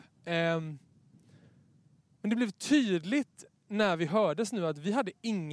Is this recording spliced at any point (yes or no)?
no